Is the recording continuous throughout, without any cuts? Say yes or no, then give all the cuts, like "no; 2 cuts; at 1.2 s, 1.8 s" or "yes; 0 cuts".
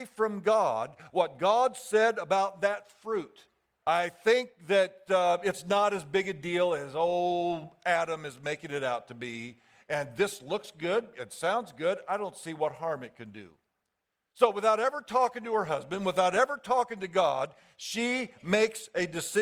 no; 1 cut; at 3.8 s